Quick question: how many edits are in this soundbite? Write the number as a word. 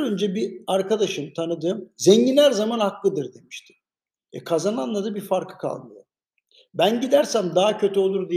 one